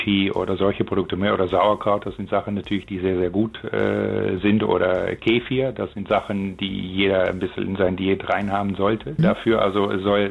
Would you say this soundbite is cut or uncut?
cut